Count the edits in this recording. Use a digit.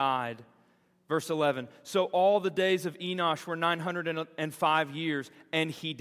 0